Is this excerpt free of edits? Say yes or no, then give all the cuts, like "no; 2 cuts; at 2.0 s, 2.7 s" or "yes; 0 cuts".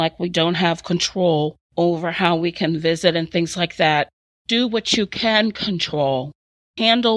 yes; 0 cuts